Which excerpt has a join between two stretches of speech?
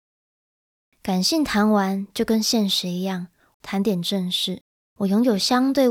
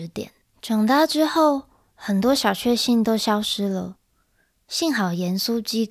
first; 2 cuts; at 3.5 s, 4.8 s

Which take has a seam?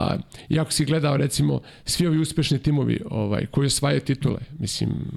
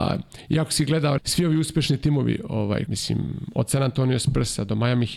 second; 2 cuts; at 1.2 s, 2.9 s

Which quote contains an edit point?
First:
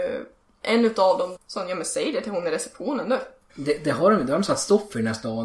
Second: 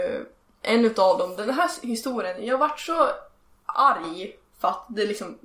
first; 2 cuts; at 1.4 s, 3.5 s

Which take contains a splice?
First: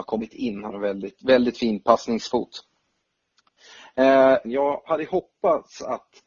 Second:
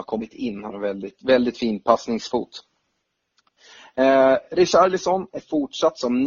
first; 1 cut; at 4.4 s

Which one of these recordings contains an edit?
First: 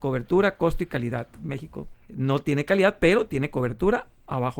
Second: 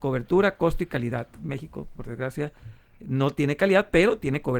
first; 1 cut; at 1.9 s

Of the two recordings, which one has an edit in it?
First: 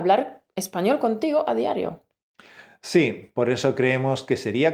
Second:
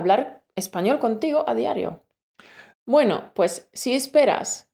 second; 1 cut; at 2.7 s

